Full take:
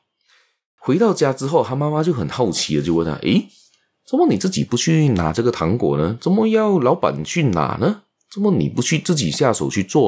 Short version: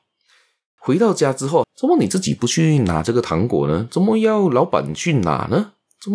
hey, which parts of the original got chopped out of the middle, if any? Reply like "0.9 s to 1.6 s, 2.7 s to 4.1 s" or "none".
1.6 s to 3.9 s